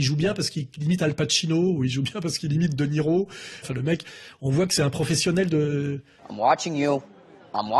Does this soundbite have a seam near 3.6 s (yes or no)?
yes